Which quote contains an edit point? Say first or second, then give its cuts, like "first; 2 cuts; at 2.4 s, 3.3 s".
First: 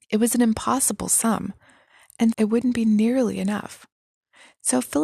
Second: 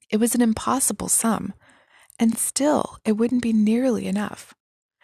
first; 1 cut; at 2.3 s